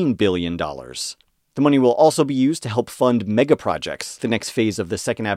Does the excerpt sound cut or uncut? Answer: cut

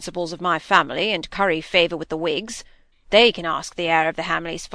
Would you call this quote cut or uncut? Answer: cut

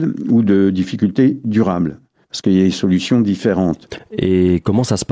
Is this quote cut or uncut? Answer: cut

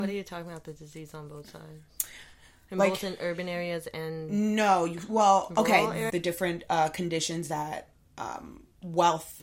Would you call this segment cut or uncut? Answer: cut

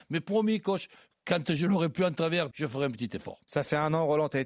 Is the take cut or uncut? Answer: cut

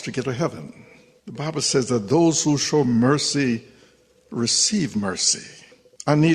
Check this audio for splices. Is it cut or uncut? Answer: uncut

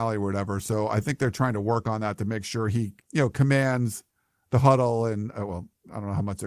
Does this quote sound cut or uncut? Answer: cut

